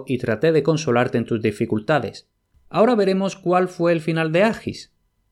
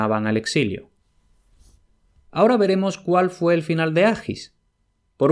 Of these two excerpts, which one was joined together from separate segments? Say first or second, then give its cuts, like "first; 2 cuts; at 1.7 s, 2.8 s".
first; 1 cut; at 2.5 s